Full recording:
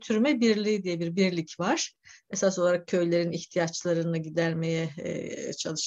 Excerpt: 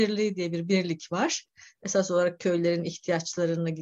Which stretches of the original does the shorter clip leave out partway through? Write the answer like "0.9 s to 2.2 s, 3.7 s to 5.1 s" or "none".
none